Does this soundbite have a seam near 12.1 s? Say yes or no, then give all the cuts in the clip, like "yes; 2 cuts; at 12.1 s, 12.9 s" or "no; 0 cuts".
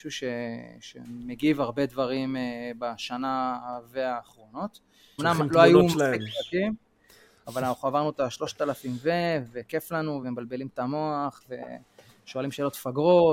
no; 2 cuts; at 5.2 s, 10.2 s